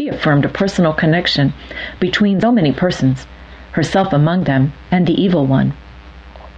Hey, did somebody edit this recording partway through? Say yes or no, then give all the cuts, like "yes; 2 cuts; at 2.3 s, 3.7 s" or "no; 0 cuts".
yes; 1 cut; at 2.4 s